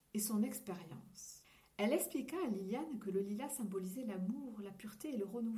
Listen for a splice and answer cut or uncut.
uncut